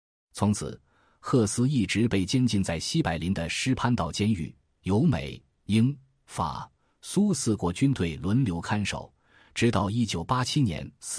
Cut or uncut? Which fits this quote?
uncut